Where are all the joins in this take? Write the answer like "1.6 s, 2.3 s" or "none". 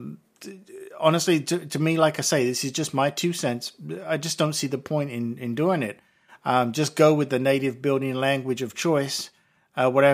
none

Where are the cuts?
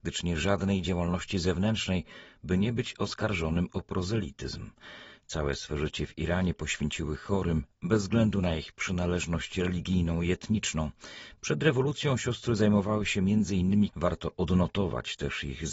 13.9 s

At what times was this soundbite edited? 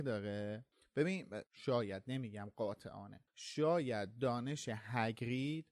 1.4 s

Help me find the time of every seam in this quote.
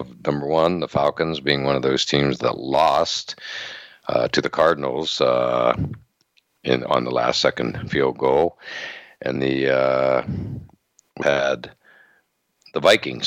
9.4 s, 11.2 s

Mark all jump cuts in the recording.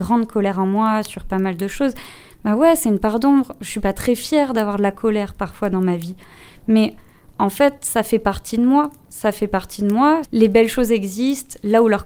10.2 s

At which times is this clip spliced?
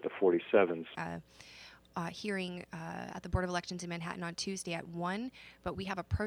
0.9 s

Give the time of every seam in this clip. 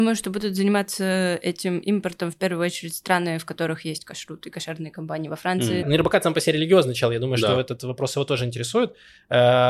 5.8 s

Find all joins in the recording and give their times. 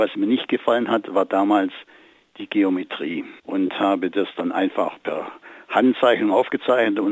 3.4 s

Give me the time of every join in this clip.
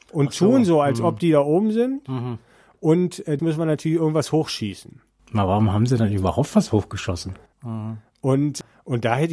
3.4 s, 7.5 s

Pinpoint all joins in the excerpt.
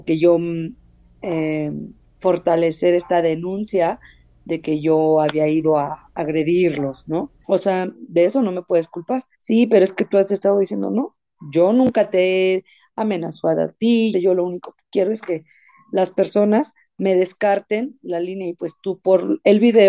7.4 s, 9.3 s, 14.1 s

